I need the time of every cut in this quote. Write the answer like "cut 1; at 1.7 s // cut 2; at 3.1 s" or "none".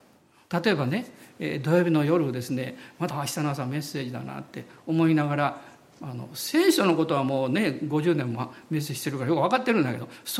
cut 1; at 3.1 s